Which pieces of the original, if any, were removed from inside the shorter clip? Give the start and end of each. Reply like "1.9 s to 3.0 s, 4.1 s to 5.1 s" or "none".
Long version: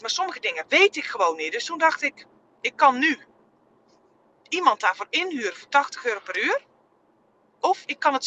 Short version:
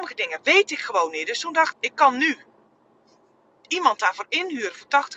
2.0 s to 2.5 s